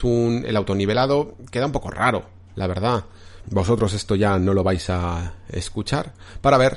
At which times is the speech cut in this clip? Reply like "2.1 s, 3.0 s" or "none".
3.4 s